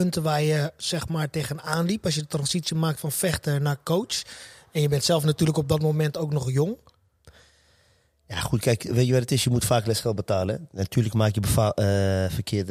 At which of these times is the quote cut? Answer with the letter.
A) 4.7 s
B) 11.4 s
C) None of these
C